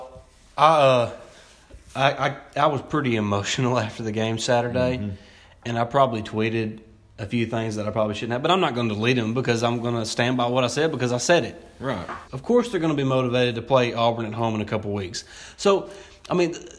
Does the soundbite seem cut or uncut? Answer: cut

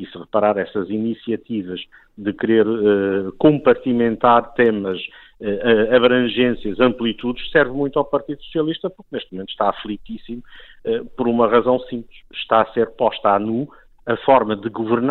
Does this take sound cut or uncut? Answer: uncut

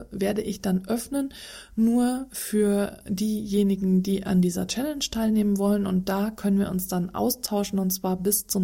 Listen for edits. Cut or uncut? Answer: uncut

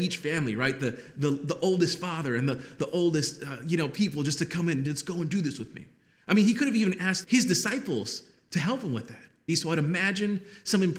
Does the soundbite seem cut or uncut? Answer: cut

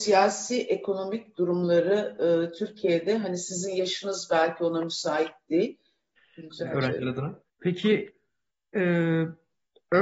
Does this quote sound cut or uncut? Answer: cut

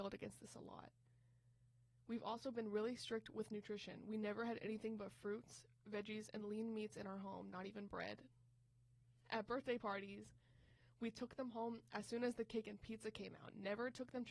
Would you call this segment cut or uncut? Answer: uncut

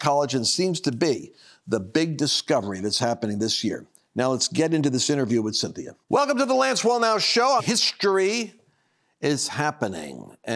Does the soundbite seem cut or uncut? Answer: cut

